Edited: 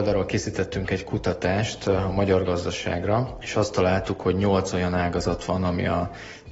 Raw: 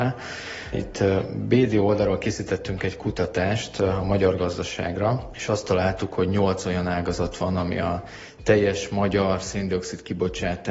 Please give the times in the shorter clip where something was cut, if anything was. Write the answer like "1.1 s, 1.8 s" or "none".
none